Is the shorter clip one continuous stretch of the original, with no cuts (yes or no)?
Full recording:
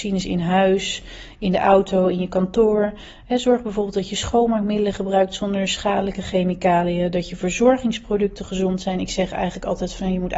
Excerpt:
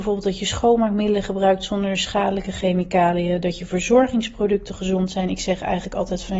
yes